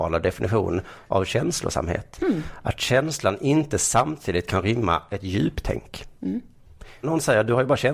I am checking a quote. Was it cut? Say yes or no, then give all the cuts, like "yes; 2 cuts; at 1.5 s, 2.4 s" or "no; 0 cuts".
yes; 1 cut; at 7.0 s